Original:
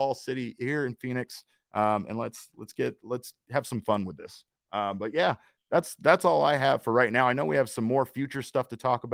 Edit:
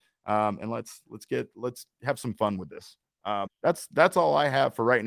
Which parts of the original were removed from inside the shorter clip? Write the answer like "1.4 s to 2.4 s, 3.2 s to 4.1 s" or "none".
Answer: 4.9 s to 5.5 s